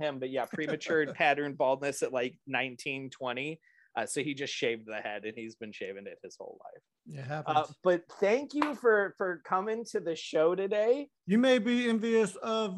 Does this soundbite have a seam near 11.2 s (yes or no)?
yes